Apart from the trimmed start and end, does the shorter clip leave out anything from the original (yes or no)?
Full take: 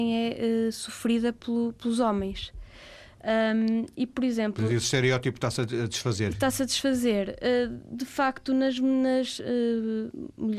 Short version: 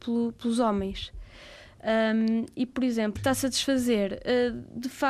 yes